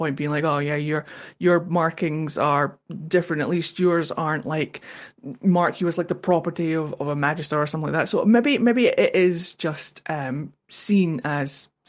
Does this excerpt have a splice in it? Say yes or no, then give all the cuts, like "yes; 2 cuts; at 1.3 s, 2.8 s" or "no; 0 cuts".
no; 0 cuts